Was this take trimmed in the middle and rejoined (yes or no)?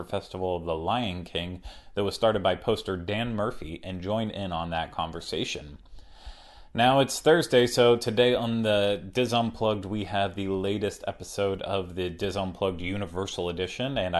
no